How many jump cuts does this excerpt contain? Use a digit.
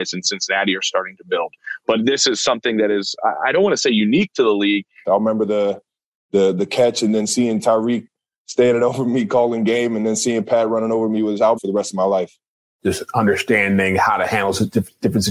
2